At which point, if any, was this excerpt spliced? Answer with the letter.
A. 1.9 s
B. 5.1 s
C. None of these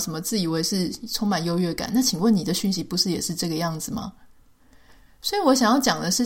C